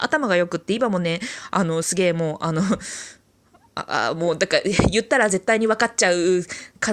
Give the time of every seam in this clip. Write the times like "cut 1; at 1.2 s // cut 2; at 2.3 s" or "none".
none